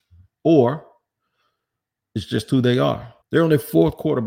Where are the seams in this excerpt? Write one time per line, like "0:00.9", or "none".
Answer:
0:03.2